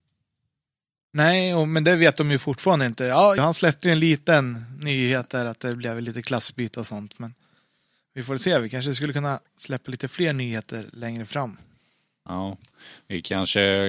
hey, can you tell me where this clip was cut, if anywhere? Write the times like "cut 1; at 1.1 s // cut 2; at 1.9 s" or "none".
cut 1; at 3.4 s